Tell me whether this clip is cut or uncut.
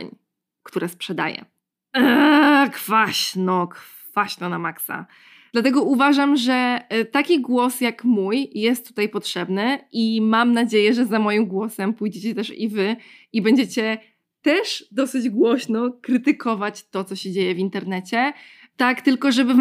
uncut